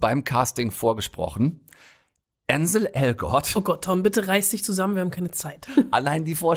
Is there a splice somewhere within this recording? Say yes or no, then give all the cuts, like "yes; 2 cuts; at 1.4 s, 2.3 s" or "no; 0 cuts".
no; 0 cuts